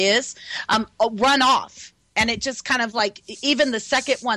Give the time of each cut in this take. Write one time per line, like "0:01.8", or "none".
none